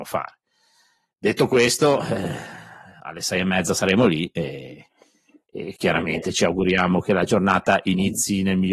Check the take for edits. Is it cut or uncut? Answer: uncut